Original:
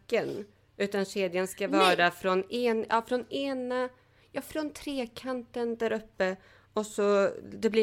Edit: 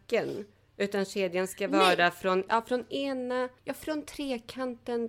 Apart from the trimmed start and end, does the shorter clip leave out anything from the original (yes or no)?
yes